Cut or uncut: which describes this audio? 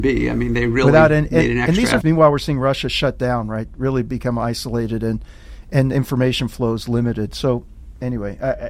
cut